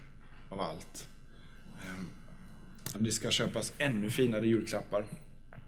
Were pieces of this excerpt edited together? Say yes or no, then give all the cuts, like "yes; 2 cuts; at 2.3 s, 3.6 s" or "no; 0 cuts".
yes; 1 cut; at 2.9 s